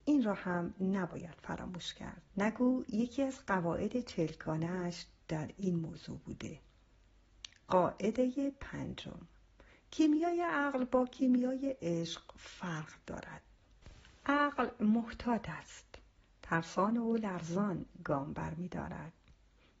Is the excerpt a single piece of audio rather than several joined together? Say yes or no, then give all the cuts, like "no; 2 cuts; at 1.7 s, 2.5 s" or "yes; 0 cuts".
no; 1 cut; at 2.3 s